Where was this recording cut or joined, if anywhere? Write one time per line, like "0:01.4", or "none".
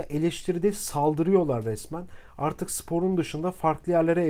none